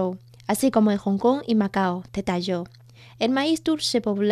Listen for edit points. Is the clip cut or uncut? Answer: uncut